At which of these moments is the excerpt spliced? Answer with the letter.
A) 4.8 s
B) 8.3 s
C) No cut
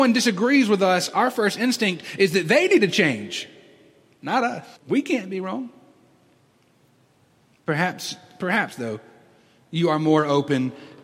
A